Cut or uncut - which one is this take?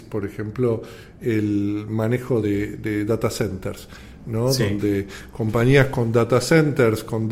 uncut